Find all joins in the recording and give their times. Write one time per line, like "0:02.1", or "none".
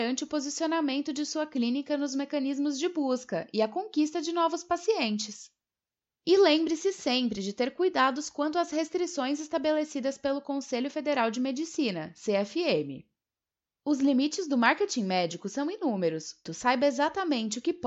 0:16.5

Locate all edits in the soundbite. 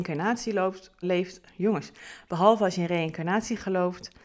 0:01.0

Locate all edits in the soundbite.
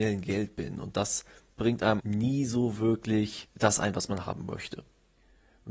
0:02.0

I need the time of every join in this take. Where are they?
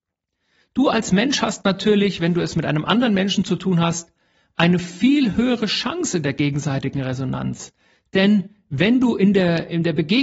none

